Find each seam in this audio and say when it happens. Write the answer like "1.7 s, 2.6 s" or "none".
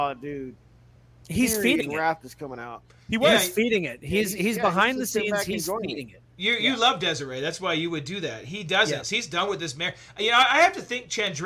9.0 s

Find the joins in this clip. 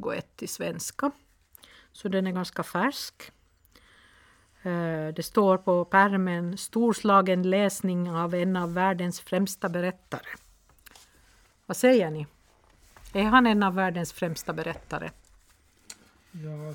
none

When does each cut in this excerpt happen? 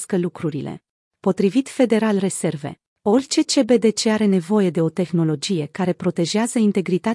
1.1 s

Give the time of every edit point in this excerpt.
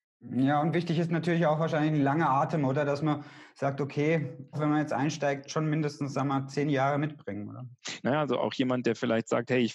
4.5 s, 8.0 s

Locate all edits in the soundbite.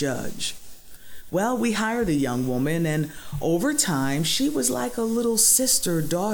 none

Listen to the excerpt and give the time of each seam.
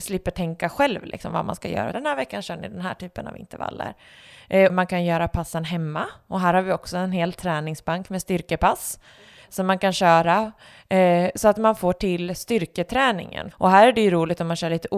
1.9 s, 4.7 s, 13.5 s

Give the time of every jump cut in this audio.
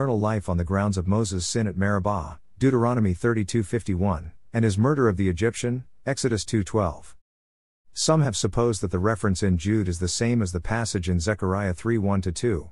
none

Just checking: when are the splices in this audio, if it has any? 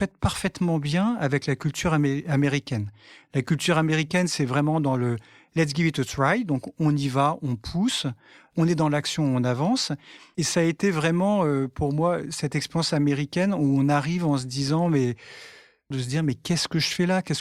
10.3 s, 15.9 s

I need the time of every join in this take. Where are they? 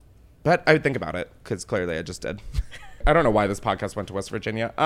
3.0 s

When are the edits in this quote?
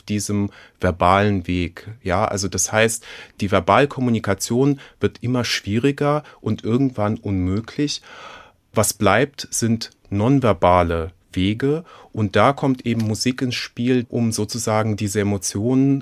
14.0 s

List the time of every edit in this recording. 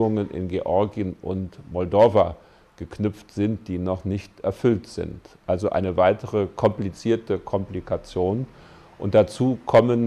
none

